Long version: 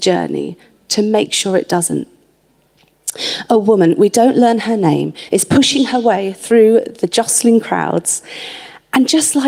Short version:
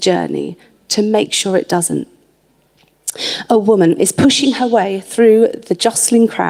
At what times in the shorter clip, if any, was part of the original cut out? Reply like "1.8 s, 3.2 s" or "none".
4.0 s